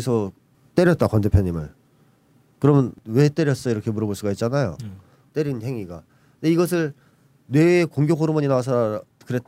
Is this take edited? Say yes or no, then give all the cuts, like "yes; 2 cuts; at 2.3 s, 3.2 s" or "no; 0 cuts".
yes; 1 cut; at 5.3 s